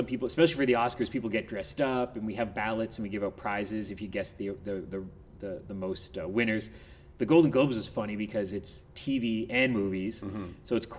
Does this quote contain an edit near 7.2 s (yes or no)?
no